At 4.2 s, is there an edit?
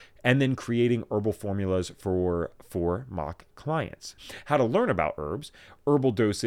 yes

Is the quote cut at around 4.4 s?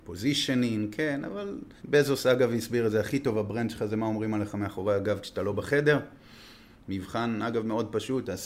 no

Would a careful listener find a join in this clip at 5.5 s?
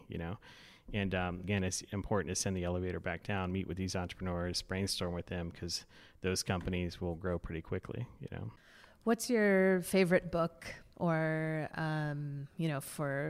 no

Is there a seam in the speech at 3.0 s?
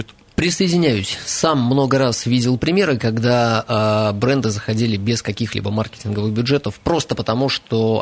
no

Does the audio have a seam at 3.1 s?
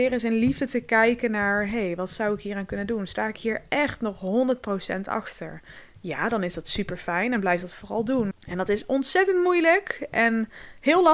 no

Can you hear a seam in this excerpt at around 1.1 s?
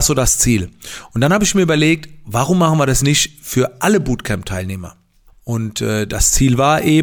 no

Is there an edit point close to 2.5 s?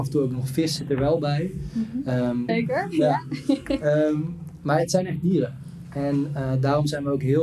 yes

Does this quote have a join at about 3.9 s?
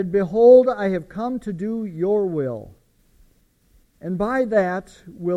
yes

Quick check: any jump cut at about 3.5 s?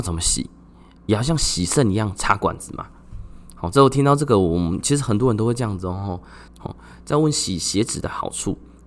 no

